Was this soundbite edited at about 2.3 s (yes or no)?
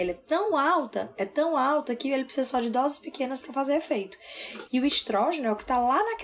no